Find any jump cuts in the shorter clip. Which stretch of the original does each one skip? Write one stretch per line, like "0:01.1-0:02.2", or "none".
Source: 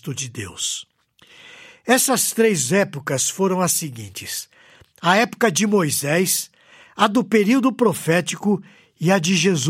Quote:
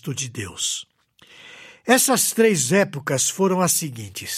none